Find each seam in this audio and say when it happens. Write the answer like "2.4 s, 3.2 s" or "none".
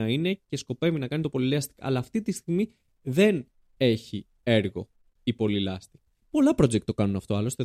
6.2 s